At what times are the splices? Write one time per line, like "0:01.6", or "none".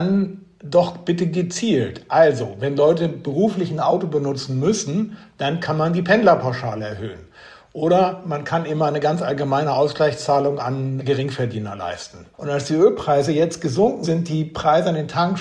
0:11.0
0:12.3
0:14.0